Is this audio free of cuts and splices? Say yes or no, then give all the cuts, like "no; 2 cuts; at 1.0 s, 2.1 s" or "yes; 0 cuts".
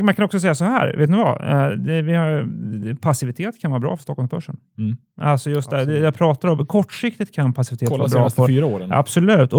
yes; 0 cuts